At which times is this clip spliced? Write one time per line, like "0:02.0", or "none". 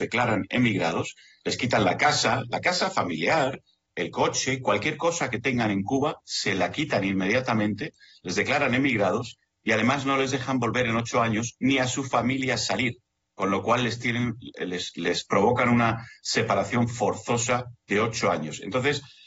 none